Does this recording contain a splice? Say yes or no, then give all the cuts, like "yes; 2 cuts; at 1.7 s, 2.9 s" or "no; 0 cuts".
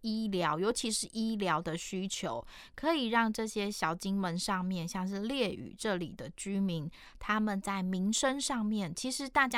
no; 0 cuts